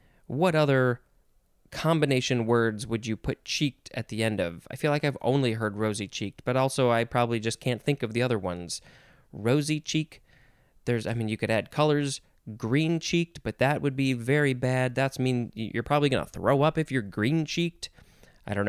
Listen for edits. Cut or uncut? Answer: uncut